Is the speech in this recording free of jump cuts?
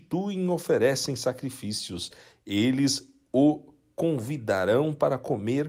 yes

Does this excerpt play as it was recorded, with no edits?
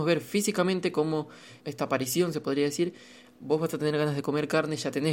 no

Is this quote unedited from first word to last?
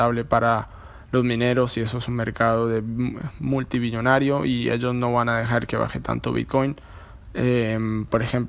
no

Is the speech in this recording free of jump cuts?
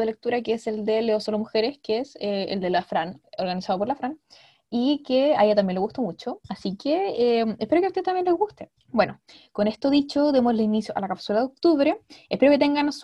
no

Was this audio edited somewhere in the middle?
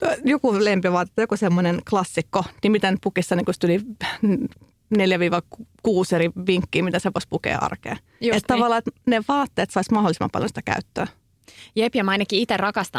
no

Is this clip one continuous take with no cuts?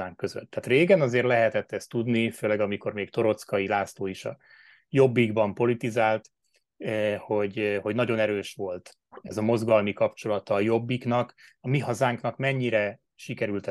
yes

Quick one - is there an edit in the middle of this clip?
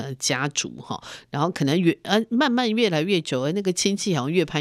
no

